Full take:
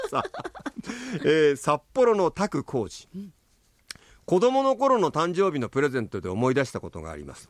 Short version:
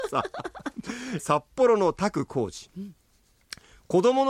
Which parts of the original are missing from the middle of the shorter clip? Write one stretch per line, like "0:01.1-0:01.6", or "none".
0:01.2-0:01.6